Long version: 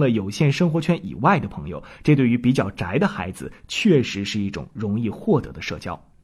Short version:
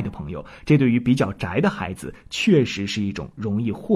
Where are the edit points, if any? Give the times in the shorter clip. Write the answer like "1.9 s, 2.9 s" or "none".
none